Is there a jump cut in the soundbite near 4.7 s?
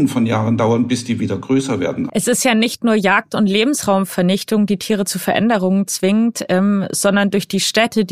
no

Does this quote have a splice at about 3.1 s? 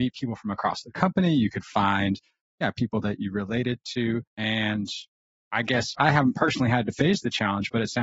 no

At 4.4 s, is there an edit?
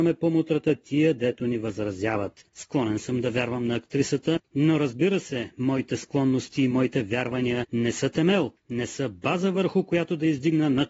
no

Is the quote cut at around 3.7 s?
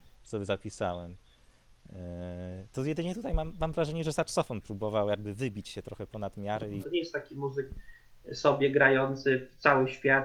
no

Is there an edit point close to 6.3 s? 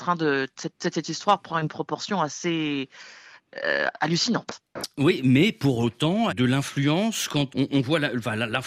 yes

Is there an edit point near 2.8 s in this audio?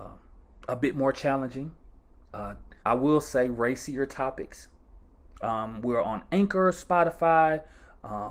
yes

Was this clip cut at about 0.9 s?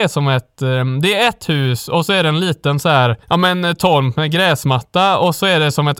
no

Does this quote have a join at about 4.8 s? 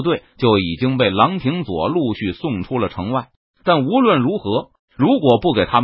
yes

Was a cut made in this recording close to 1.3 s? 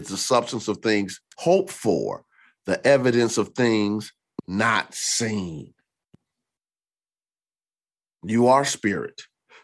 yes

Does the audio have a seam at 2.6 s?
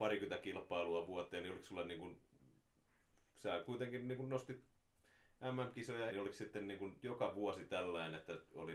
no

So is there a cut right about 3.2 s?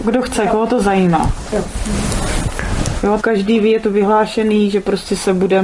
yes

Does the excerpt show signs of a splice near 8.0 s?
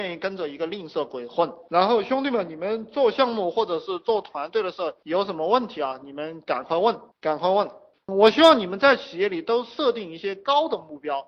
no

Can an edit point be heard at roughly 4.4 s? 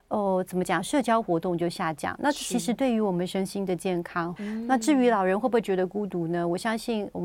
yes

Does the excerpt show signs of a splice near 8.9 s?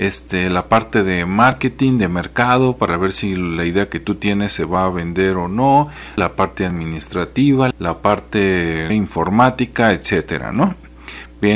yes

